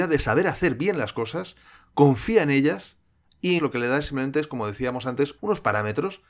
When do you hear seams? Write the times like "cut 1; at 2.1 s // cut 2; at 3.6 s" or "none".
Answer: cut 1; at 3.6 s // cut 2; at 5.4 s

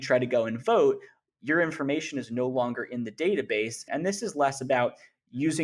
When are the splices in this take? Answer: cut 1; at 3.9 s

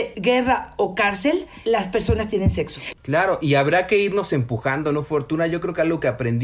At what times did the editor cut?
cut 1; at 2.9 s

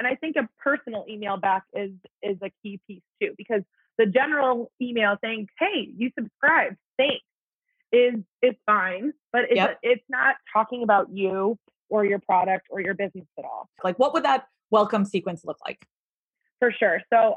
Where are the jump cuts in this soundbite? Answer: cut 1; at 13.8 s

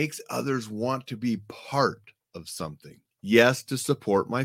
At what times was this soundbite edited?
cut 1; at 3.1 s

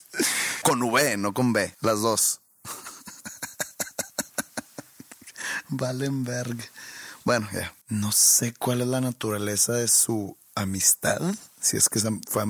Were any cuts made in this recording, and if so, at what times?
cut 1; at 1.7 s // cut 2; at 7.8 s

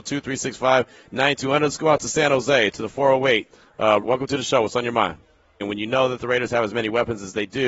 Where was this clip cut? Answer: cut 1; at 4.0 s // cut 2; at 5.6 s

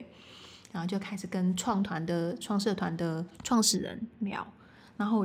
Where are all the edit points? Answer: cut 1; at 3.3 s

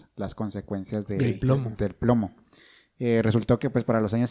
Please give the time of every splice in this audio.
none

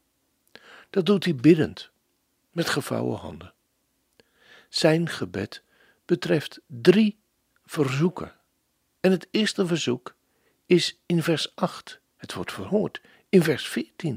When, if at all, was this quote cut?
cut 1; at 12.1 s

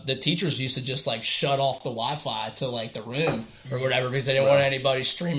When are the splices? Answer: none

